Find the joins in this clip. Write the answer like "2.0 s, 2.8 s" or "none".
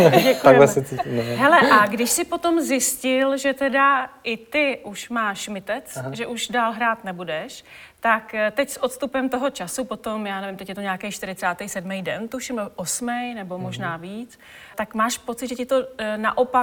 14.7 s